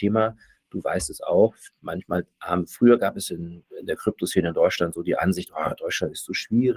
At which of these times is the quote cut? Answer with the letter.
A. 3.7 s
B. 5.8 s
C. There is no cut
C